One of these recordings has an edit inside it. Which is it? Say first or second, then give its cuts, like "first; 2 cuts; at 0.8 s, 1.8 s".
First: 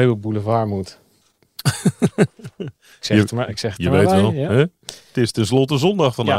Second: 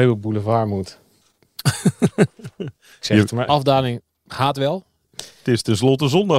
second; 2 cuts; at 3.5 s, 5.1 s